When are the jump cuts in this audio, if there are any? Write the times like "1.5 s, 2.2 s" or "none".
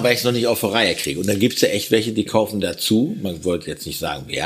none

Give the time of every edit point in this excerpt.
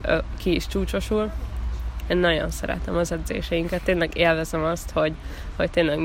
2.0 s

